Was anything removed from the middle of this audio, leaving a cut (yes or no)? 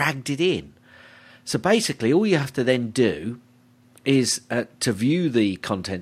no